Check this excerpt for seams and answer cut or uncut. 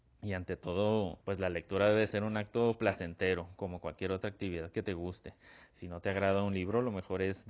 cut